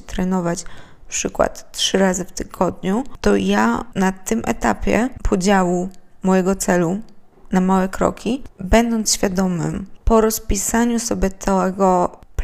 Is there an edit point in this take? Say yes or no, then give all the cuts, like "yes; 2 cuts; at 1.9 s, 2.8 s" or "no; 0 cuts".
yes; 2 cuts; at 8.5 s, 10.0 s